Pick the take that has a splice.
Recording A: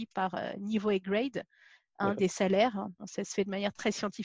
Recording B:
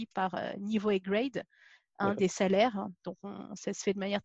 A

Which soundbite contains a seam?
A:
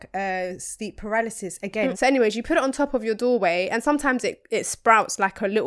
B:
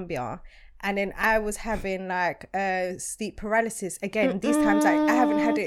A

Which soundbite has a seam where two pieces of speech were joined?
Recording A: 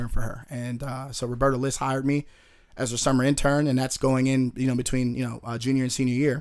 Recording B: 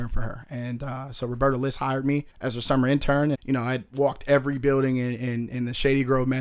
B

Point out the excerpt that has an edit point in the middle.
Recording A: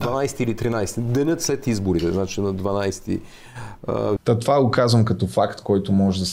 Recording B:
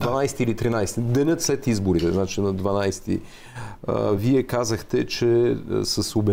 A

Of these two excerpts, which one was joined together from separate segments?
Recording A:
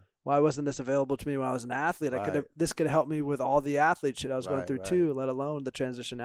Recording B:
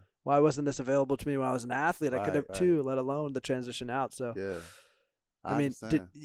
B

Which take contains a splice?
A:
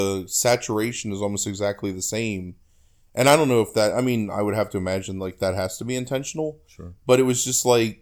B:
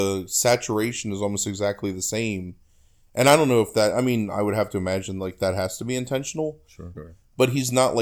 B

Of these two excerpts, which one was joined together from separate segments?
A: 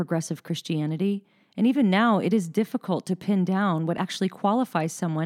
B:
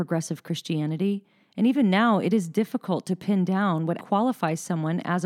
B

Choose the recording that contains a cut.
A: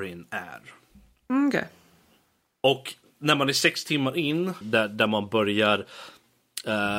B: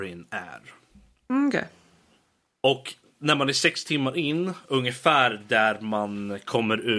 A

